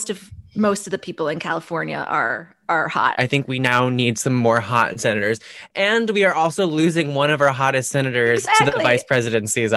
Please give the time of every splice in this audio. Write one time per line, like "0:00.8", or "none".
0:03.1